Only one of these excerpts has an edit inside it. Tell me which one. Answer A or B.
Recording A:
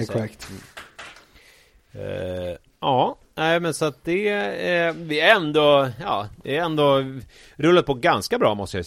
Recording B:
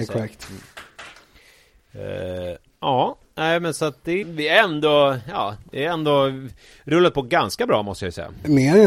B